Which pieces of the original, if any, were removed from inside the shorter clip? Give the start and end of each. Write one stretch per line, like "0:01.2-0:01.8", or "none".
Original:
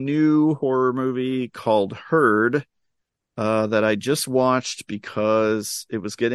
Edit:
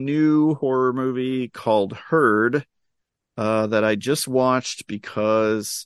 none